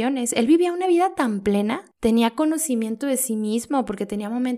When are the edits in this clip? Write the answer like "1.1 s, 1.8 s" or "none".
none